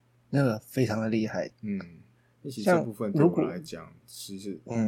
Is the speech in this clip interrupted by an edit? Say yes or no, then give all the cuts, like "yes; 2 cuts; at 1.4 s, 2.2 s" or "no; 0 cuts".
yes; 1 cut; at 1.5 s